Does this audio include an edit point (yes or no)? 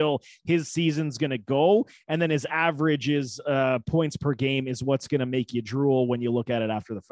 no